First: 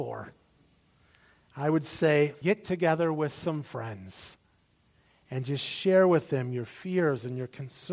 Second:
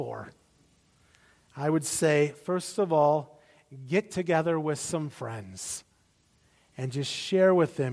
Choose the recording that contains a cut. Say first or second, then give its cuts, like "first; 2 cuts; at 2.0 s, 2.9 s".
first; 1 cut; at 2.4 s